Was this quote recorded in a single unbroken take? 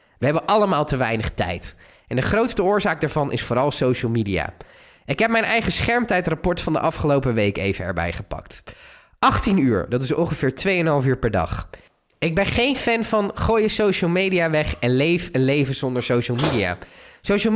yes; 0 cuts

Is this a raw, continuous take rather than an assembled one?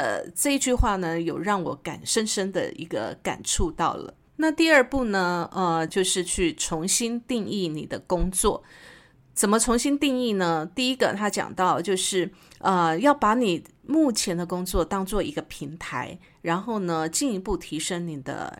no; 1 cut; at 5.9 s

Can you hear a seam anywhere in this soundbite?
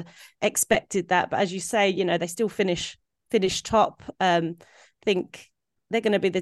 no; 0 cuts

